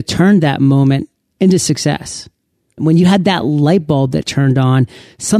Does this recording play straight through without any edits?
no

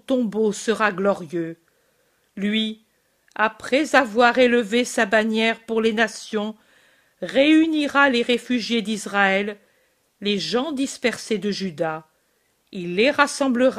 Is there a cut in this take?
no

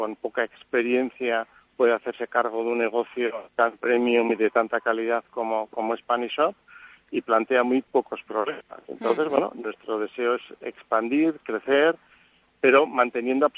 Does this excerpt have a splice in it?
no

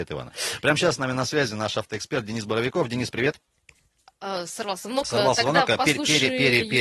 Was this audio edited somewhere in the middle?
no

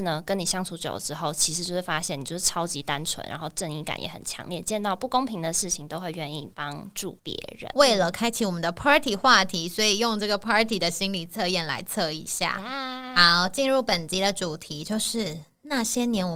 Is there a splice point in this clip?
yes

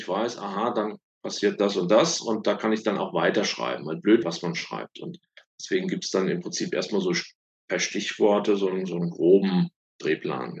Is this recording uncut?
no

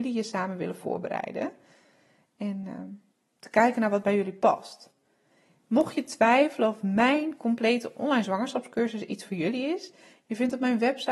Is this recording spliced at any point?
no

